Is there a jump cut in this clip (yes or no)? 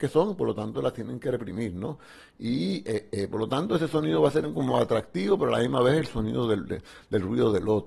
no